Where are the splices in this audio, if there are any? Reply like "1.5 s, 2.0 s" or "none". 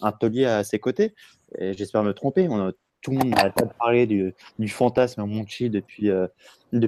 none